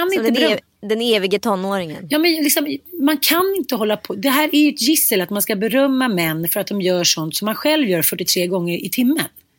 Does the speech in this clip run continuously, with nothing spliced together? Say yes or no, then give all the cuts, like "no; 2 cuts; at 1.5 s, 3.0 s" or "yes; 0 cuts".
yes; 0 cuts